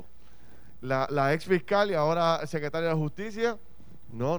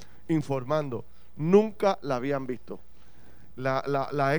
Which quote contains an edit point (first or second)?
first